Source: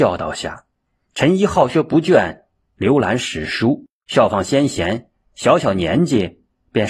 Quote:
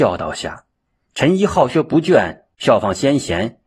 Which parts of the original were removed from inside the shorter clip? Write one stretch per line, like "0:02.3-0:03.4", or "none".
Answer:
0:02.5-0:04.0